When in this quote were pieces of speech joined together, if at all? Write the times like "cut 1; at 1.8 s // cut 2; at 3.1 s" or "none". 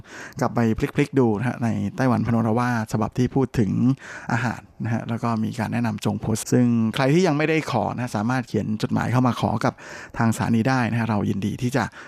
cut 1; at 6.4 s